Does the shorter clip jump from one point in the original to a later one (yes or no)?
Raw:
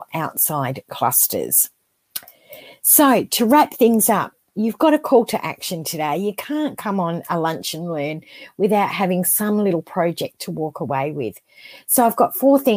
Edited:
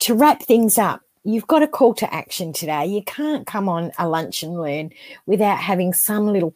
no